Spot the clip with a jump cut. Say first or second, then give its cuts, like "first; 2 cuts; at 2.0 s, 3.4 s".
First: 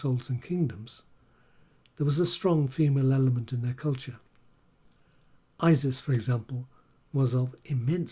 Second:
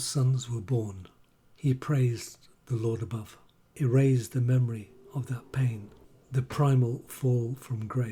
second; 1 cut; at 3.7 s